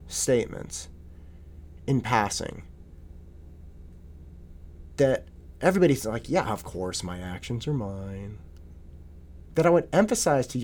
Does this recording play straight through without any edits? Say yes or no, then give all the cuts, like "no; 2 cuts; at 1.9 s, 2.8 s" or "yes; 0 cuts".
no; 1 cut; at 9.5 s